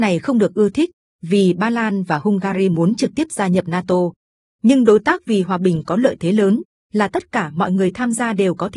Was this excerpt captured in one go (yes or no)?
yes